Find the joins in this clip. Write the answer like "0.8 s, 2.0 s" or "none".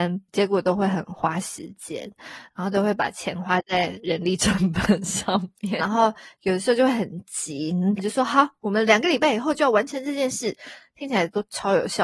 5.8 s, 8.0 s